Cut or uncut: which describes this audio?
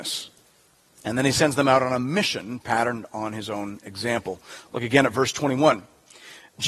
uncut